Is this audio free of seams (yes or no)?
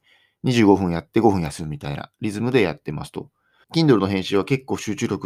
no